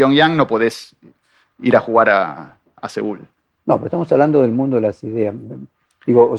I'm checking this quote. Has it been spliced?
no; 0 cuts

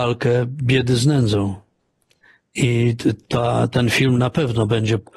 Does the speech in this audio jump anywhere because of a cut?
no; 0 cuts

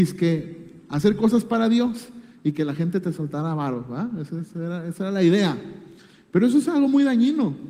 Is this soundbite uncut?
yes; 0 cuts

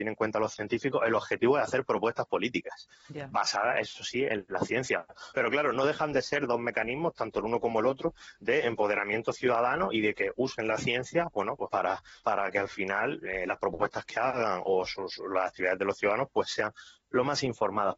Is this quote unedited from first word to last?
yes; 0 cuts

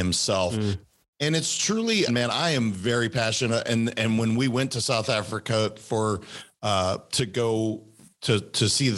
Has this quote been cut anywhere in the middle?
yes; 1 cut; at 2.1 s

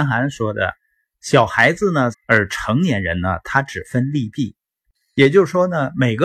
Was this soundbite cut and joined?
yes; 2 cuts; at 2.1 s, 5.0 s

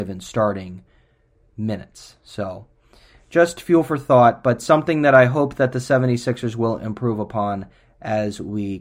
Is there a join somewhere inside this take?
no; 0 cuts

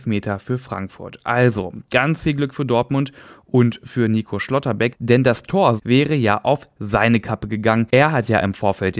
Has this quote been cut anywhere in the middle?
yes; 1 cut; at 5.8 s

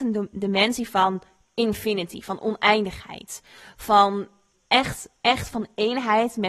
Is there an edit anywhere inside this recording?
yes; 1 cut; at 4.5 s

